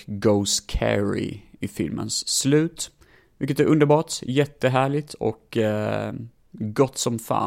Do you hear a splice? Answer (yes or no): no